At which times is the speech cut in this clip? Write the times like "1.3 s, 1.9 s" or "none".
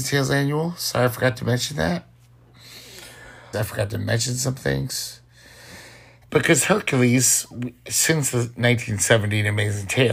3.5 s, 6.3 s